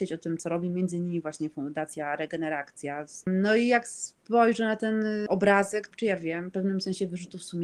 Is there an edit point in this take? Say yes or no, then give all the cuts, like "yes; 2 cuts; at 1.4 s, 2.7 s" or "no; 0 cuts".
yes; 2 cuts; at 3.2 s, 5.9 s